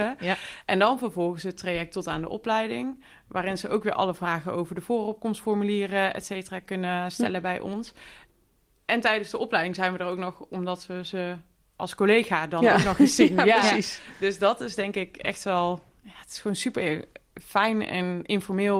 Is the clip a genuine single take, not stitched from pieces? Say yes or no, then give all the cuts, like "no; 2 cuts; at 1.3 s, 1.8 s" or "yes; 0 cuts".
yes; 0 cuts